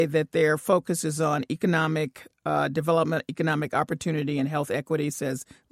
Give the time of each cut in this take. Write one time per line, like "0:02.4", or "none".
none